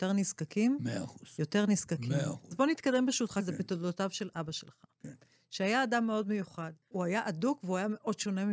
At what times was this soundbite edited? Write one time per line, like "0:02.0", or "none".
none